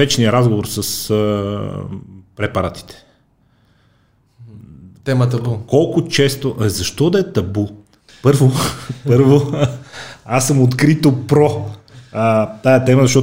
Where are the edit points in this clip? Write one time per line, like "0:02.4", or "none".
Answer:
none

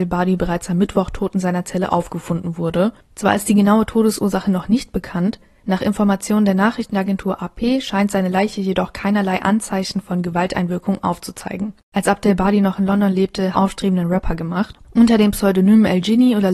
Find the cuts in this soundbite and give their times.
0:13.5

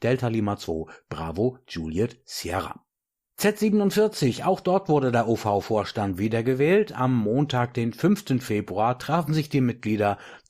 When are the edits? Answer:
none

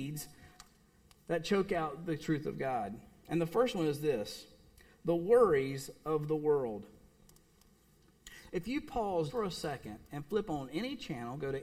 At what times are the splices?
0:09.3

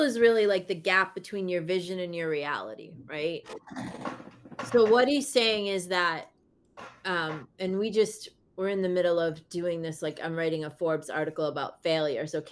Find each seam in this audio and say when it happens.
none

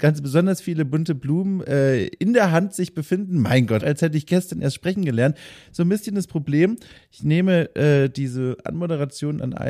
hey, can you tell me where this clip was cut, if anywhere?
0:03.8

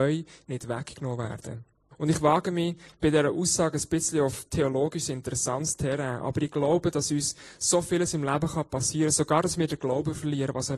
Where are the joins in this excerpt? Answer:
0:01.9

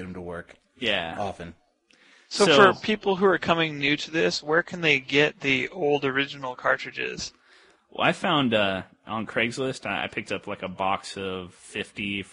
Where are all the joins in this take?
none

